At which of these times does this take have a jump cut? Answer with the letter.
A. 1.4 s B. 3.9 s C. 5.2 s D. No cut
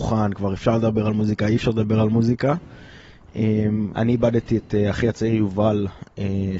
B